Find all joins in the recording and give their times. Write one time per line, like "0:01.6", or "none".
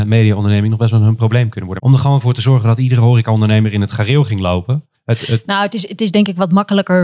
0:01.8
0:04.9